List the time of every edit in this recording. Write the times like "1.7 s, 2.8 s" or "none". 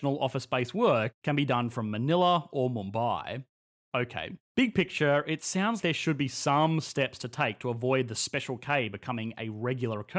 4.5 s, 5.8 s